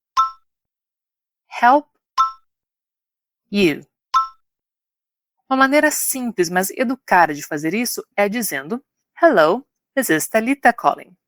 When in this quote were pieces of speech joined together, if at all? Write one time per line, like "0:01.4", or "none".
0:05.4

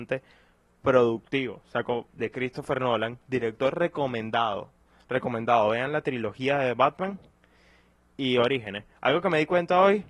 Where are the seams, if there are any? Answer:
0:02.1

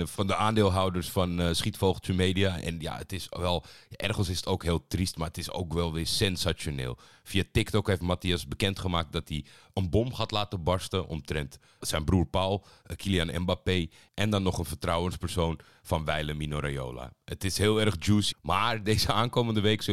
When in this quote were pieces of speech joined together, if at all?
0:11.8
0:18.3

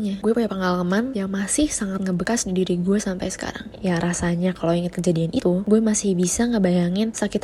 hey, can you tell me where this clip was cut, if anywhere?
none

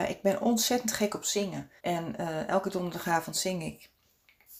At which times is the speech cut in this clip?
0:01.8

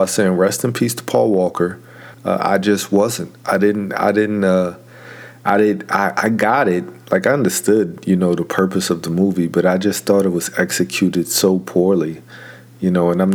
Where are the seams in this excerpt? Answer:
0:02.1

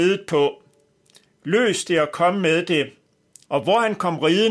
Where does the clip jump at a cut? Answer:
0:03.5

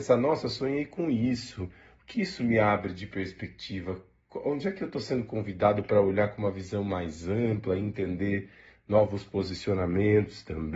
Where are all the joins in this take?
none

